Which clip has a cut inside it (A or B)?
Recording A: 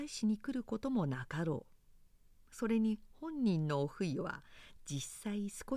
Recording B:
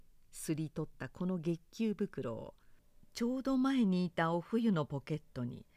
A